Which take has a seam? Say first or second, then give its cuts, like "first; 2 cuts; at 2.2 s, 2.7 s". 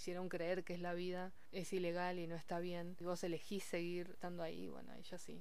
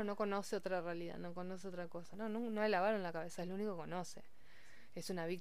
second; 1 cut; at 2.1 s